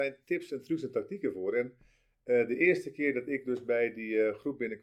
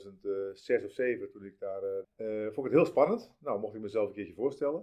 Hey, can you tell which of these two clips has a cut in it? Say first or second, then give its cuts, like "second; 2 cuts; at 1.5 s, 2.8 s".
second; 1 cut; at 2.0 s